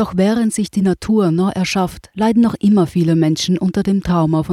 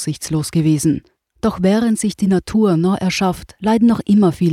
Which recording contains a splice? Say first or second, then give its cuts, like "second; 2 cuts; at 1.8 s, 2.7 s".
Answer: second; 1 cut; at 1.3 s